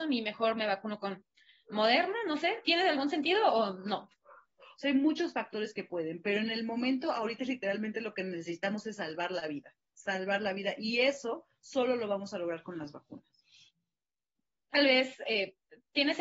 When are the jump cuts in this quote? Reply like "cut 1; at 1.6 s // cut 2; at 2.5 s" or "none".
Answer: cut 1; at 4.6 s